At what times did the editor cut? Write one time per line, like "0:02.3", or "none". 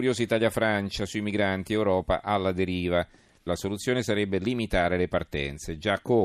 0:03.5